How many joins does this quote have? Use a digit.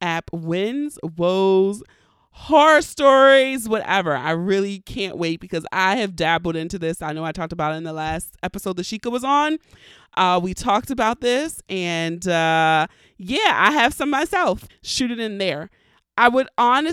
1